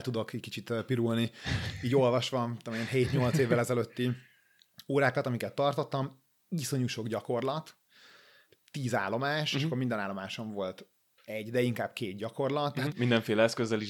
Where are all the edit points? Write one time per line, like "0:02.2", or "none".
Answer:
0:12.9